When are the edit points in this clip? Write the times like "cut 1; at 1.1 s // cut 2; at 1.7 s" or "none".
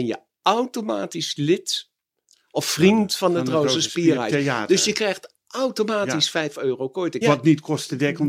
cut 1; at 7.2 s